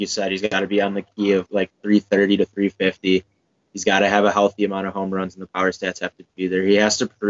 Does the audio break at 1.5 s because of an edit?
yes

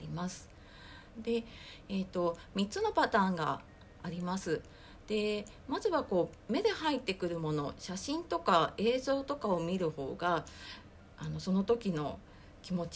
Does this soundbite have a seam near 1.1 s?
yes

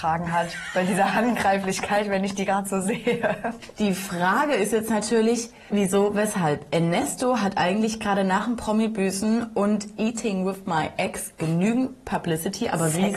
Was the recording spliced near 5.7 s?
yes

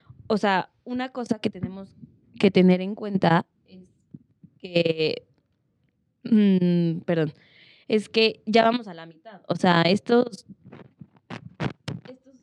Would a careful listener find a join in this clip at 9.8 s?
no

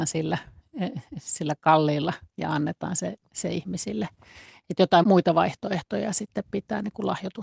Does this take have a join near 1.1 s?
no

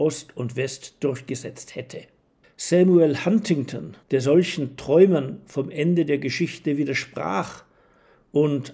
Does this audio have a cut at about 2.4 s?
yes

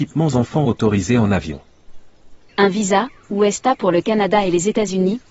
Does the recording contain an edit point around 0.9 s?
no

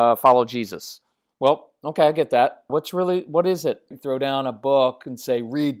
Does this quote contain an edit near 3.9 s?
yes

